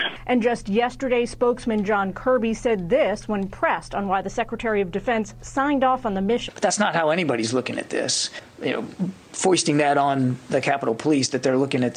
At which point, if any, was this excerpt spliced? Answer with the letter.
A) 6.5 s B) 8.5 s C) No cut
A